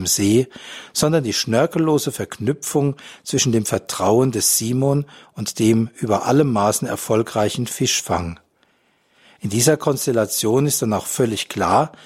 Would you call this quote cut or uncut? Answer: uncut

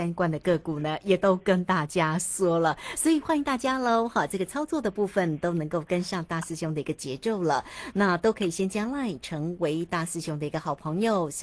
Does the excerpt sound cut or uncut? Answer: uncut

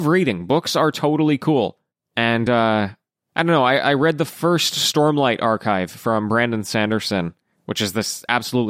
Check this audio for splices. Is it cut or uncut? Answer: uncut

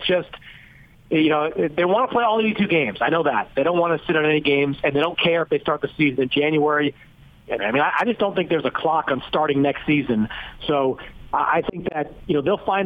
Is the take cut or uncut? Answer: cut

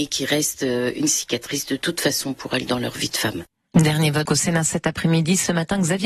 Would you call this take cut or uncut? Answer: cut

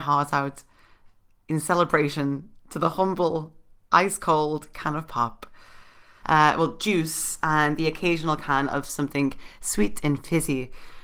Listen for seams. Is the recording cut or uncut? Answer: cut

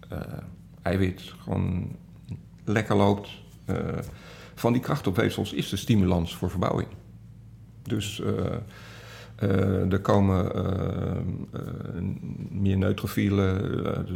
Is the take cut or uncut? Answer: uncut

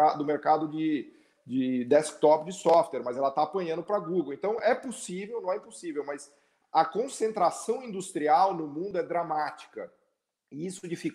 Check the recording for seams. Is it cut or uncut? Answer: uncut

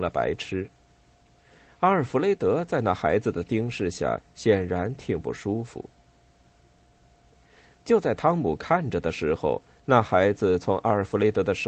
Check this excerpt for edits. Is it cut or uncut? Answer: uncut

